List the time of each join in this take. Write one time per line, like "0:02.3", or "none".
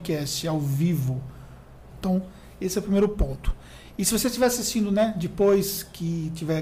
0:01.9